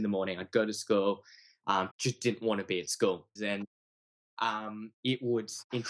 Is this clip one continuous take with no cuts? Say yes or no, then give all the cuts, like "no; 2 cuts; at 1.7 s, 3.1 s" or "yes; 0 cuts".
no; 3 cuts; at 1.9 s, 3.4 s, 4.9 s